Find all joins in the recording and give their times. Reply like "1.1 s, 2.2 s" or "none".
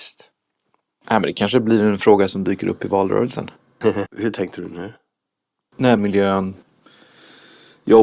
4.1 s, 6.0 s